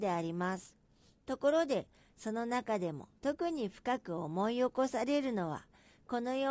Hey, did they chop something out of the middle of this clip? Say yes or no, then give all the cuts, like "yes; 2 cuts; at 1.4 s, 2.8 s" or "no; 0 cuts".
yes; 2 cuts; at 1.1 s, 3.2 s